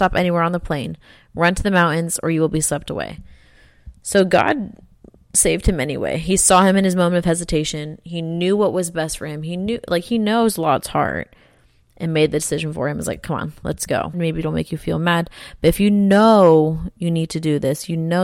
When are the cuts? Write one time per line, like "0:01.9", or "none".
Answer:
0:14.1